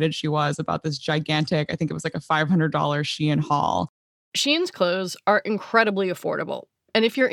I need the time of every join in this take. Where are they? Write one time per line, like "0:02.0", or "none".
none